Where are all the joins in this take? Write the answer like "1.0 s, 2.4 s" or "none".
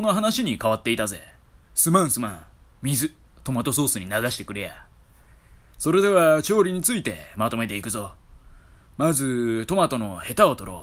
3.3 s